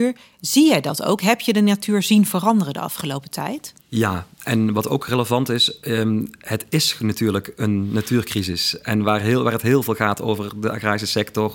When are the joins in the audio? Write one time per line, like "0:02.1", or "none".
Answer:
0:03.8